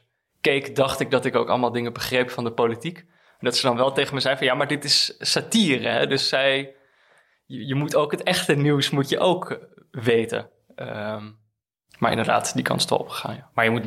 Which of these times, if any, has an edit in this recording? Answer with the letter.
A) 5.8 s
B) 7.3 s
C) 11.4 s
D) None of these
D